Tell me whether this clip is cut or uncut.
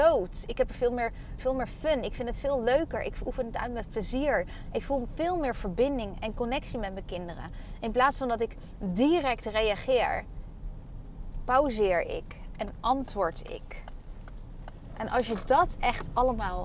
cut